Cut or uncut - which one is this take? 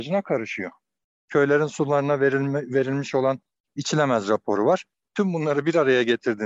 cut